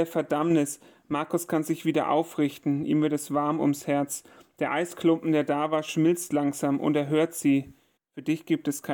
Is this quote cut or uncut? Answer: cut